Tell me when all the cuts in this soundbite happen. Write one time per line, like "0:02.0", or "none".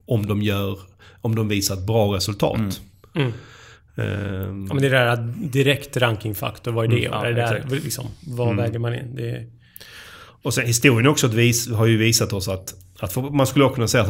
0:07.1